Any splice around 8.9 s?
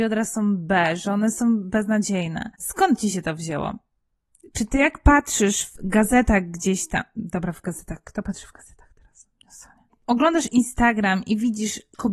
no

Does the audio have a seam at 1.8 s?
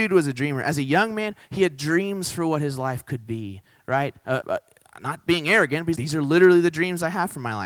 no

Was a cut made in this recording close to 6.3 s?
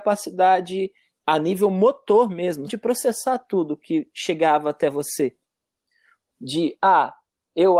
yes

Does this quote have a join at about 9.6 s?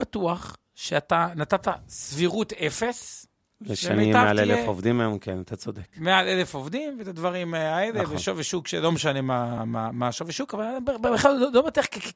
yes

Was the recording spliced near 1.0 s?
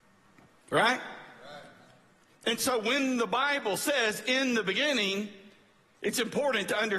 no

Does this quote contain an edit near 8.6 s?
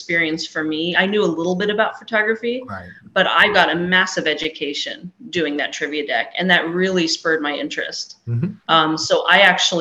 no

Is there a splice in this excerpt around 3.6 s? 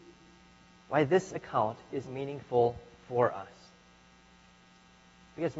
no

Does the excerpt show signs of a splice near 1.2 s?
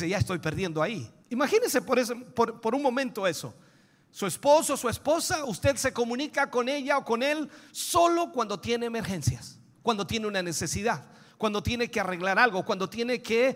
yes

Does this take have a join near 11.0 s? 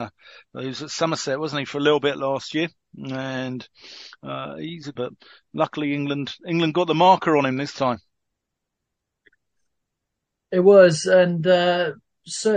no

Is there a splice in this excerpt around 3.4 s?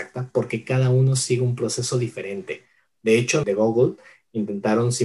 yes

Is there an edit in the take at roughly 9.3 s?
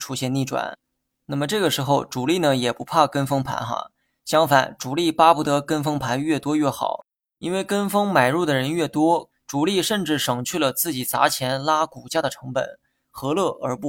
yes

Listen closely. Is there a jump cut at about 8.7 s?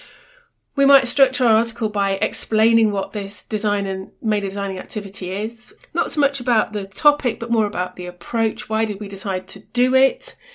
no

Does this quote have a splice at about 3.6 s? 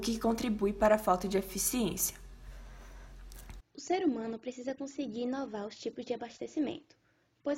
yes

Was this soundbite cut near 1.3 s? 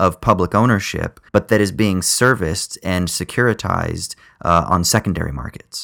yes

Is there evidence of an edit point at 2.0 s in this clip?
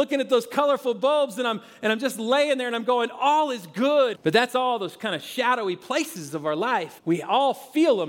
no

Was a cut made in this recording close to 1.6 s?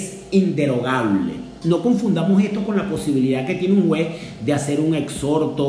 yes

